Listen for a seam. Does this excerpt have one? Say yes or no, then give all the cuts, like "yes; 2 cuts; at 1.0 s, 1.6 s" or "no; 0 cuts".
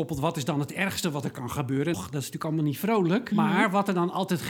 yes; 2 cuts; at 1.9 s, 3.3 s